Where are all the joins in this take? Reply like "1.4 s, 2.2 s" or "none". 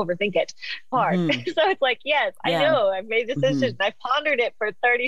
0.9 s